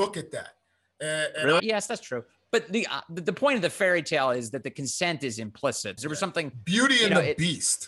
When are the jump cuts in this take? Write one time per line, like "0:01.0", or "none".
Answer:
0:01.6
0:06.0